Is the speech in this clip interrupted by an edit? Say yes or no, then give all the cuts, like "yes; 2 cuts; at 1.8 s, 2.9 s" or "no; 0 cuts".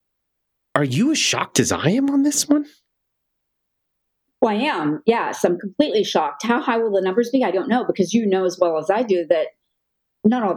no; 0 cuts